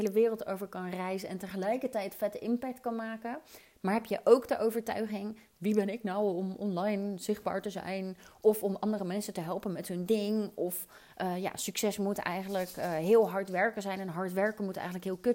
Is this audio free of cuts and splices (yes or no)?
yes